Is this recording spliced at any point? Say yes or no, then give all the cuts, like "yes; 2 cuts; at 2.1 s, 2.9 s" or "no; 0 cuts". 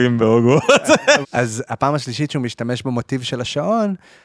yes; 1 cut; at 1.2 s